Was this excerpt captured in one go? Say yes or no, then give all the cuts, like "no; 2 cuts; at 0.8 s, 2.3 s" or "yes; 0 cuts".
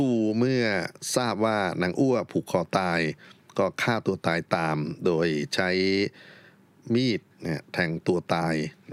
yes; 0 cuts